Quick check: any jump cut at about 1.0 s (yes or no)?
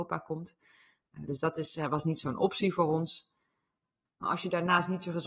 no